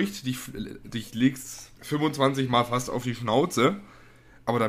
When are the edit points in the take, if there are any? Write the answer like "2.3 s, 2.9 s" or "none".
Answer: 1.8 s